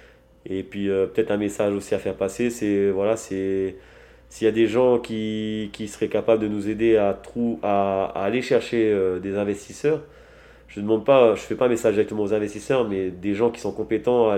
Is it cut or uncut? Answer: uncut